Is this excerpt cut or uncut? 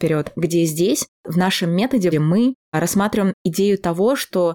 cut